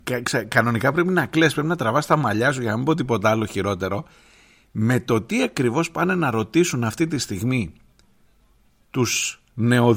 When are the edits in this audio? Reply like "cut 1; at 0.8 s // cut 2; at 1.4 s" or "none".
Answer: none